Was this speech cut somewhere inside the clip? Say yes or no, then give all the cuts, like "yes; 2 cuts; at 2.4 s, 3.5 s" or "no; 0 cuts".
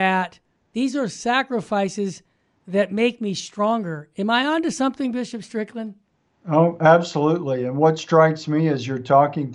no; 0 cuts